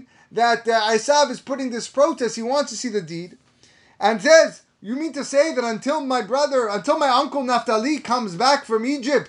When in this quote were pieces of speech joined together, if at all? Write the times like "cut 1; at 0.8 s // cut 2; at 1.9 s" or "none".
none